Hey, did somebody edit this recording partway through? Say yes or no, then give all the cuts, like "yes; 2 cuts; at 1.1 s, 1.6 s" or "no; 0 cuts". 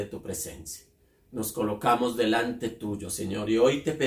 no; 0 cuts